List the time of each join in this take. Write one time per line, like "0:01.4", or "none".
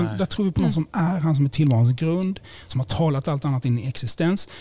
0:02.7